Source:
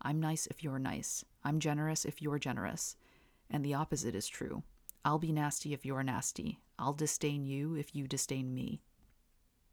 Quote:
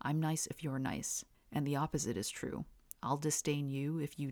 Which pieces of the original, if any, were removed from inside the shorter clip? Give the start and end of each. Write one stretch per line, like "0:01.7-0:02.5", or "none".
0:01.3-0:03.3
0:04.9-0:06.7